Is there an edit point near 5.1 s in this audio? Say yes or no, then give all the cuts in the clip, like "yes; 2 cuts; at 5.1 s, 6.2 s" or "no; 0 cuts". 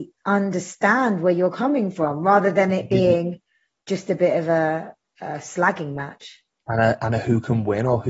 no; 0 cuts